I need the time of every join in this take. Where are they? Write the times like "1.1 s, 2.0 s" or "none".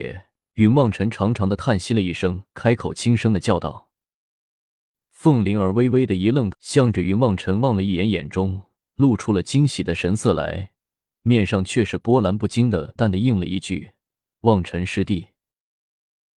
6.5 s, 13.0 s